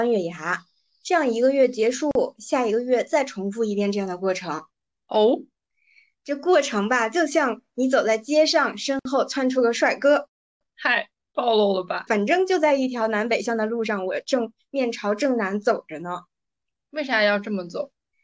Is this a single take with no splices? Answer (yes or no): no